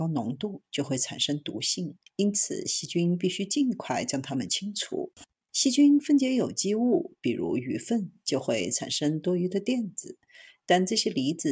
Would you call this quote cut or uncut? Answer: cut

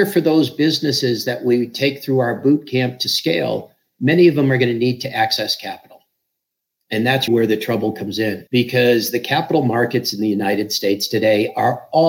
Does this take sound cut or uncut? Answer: cut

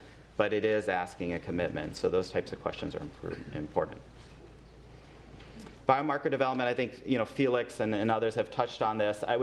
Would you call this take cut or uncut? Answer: uncut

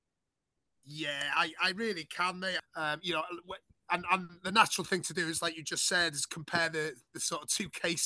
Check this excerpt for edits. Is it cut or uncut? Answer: cut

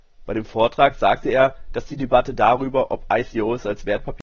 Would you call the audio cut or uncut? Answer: uncut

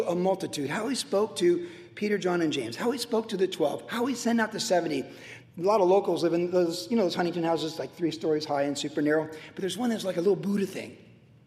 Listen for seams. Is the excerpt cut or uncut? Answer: cut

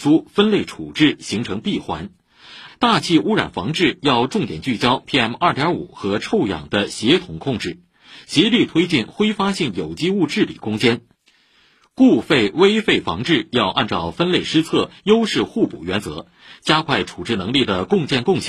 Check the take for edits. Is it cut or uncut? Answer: cut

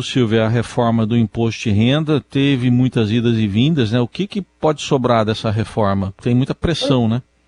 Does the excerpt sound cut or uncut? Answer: uncut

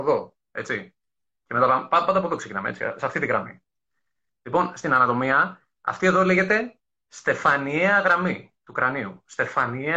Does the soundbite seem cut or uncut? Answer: uncut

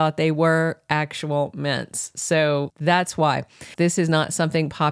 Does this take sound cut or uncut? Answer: cut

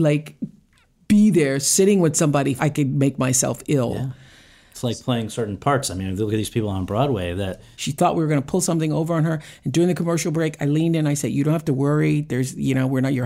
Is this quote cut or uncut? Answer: cut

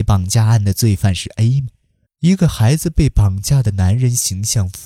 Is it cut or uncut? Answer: cut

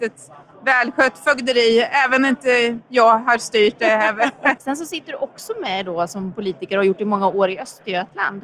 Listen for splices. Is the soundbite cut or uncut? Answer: cut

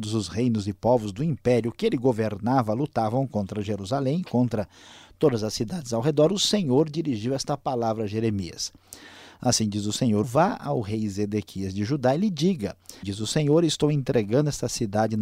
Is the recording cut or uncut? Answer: cut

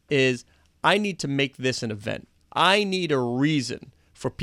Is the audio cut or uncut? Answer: uncut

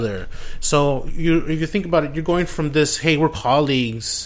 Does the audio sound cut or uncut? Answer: cut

